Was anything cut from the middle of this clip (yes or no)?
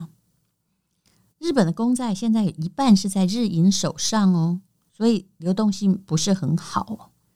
no